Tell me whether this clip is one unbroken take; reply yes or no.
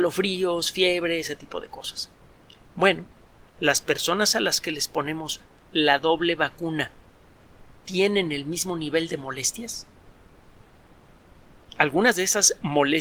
no